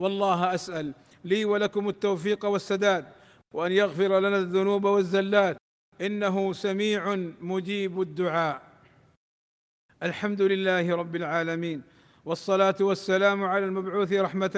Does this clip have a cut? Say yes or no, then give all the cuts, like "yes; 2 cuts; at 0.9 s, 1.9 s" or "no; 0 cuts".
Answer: no; 0 cuts